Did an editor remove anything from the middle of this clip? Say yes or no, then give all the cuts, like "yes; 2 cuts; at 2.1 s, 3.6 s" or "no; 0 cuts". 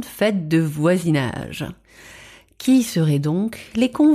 no; 0 cuts